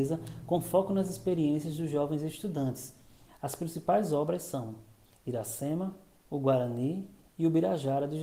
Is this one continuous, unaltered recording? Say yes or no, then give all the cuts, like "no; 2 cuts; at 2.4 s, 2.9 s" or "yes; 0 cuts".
no; 1 cut; at 3.3 s